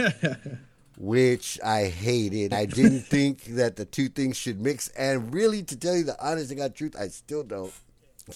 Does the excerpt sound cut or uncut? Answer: cut